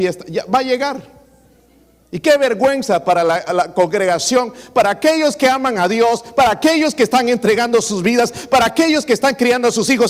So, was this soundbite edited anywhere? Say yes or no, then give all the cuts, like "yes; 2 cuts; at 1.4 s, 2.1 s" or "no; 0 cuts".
yes; 1 cut; at 3.5 s